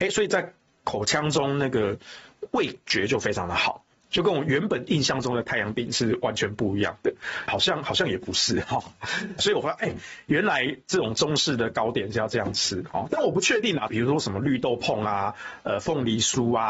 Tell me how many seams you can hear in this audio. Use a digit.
3